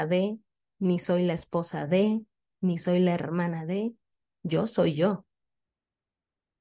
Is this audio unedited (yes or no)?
yes